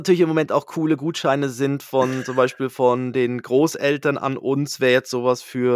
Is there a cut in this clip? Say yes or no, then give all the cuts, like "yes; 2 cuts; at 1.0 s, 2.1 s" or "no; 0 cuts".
no; 0 cuts